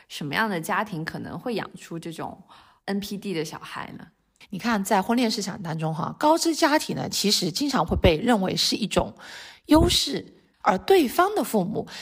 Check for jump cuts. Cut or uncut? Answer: cut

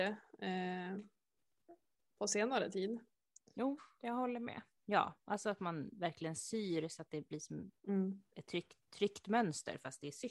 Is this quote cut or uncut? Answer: cut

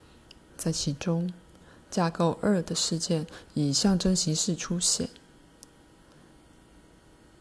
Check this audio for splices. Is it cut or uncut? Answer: uncut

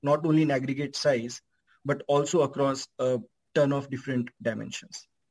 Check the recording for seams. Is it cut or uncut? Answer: uncut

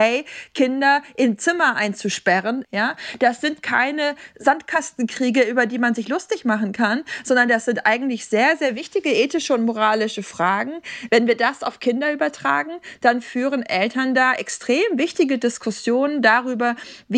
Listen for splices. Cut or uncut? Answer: cut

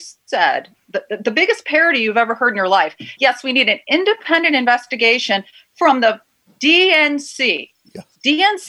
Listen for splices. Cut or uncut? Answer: uncut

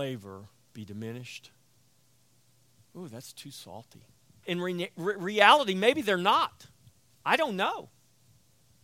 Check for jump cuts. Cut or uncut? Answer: cut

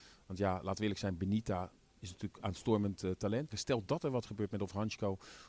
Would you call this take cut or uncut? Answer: cut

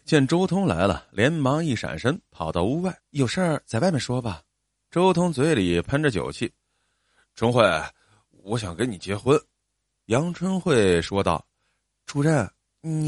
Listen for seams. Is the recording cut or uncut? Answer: cut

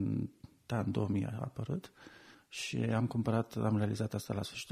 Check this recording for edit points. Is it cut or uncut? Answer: cut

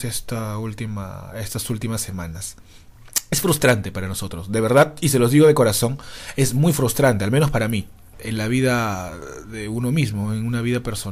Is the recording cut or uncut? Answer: cut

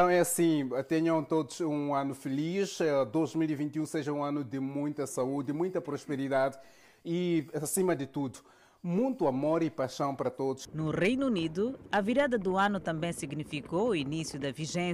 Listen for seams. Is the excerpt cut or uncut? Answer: uncut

